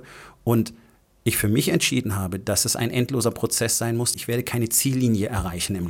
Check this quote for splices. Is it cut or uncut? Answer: cut